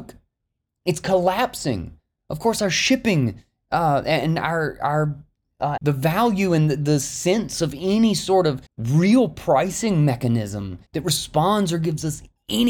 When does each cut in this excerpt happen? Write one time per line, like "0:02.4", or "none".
0:05.8
0:08.7
0:10.9